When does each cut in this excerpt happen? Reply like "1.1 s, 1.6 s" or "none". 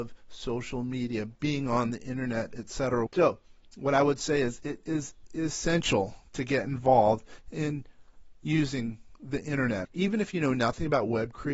3.1 s, 9.8 s